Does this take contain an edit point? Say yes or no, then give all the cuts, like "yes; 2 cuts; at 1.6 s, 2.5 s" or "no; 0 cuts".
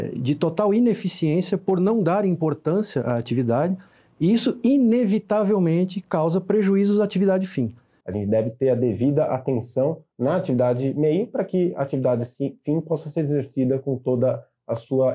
yes; 2 cuts; at 8.0 s, 10.1 s